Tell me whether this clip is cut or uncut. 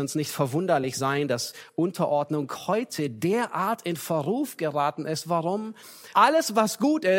cut